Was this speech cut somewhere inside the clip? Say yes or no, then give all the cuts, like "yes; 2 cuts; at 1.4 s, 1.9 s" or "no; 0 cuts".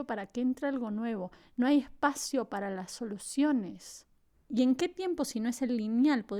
yes; 1 cut; at 4.3 s